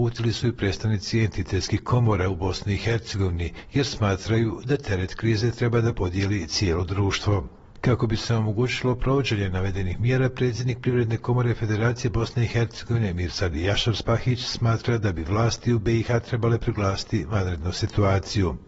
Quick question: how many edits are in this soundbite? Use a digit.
0